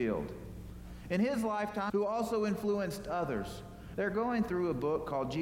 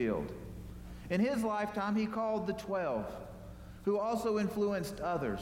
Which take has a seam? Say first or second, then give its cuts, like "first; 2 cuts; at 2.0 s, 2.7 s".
first; 2 cuts; at 1.9 s, 4.0 s